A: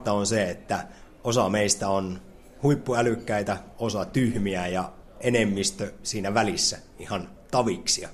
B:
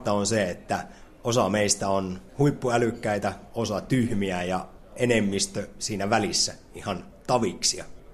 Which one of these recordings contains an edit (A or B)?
B